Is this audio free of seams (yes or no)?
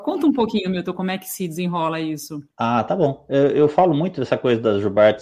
no